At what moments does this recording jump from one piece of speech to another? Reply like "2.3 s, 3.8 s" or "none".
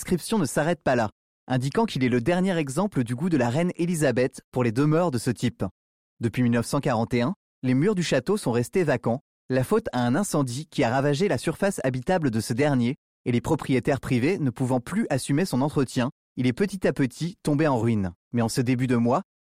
18.2 s